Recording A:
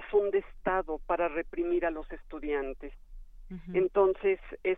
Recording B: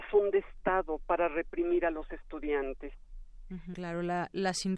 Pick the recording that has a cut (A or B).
B